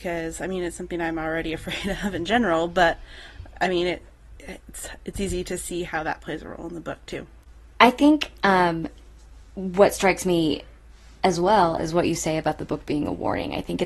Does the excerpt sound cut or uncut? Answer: uncut